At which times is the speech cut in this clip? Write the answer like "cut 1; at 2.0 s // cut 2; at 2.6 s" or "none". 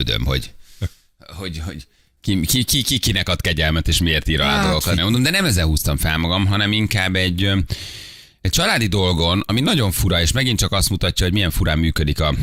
cut 1; at 5.0 s